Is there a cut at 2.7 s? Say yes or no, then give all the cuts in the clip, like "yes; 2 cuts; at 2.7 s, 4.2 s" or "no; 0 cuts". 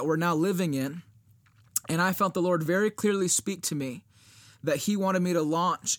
no; 0 cuts